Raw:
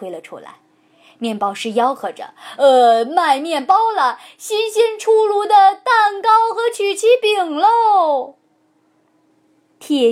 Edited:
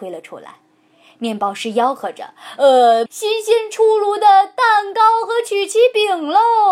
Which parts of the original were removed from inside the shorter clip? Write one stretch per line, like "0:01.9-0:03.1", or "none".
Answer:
0:03.1-0:04.3

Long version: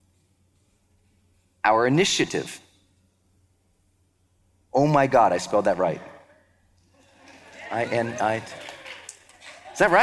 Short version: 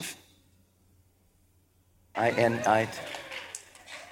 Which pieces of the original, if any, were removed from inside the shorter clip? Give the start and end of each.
0:04.6-0:07.7

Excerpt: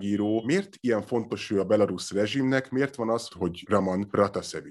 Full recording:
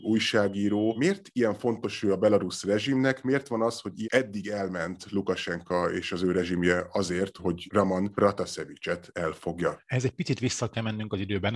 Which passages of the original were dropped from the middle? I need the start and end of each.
0:03.8-0:07.3

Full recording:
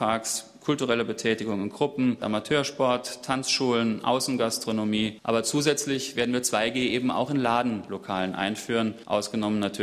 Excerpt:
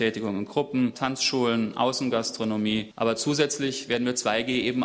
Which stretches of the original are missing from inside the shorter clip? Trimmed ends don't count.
0:02.2-0:03.2

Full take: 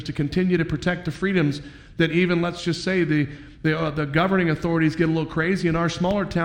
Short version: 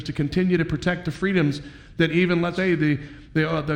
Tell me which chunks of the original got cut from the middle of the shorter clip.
0:02.6-0:02.8

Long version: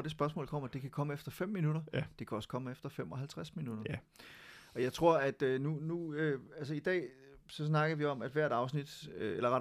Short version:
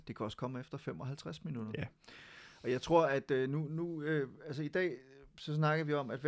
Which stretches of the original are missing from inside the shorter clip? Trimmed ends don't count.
none

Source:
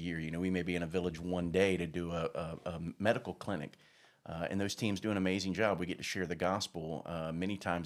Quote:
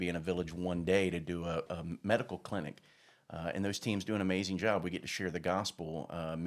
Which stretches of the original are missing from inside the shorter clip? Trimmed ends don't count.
0:02.3-0:02.6

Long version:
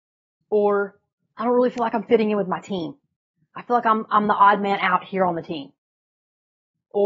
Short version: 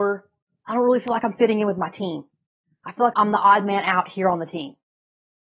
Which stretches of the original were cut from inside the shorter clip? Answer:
0:03.8-0:04.1

